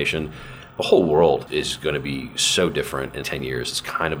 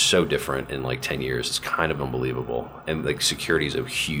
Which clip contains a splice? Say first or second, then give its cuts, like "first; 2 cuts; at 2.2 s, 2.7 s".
first; 2 cuts; at 1.5 s, 3.2 s